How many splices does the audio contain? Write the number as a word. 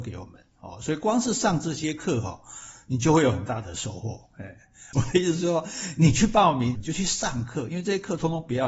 two